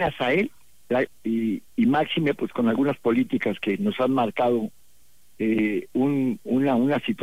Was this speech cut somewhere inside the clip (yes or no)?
yes